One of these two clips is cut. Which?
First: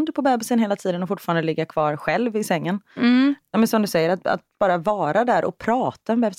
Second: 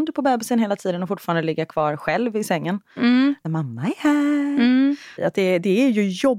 second; 2 cuts; at 3.4 s, 5.2 s

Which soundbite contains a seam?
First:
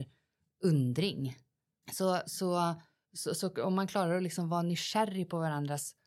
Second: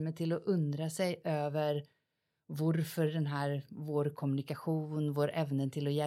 first; 2 cuts; at 1.8 s, 3.4 s

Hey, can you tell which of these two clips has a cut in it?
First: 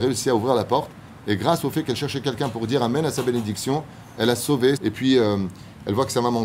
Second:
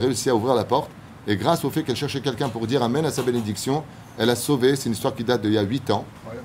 first; 1 cut; at 4.8 s

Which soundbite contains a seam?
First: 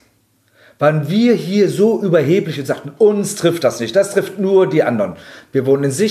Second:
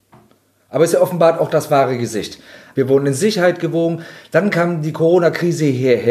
second; 1 cut; at 2.7 s

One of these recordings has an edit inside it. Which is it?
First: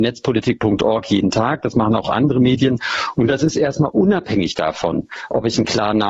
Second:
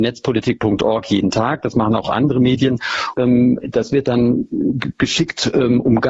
second; 1 cut; at 3.1 s

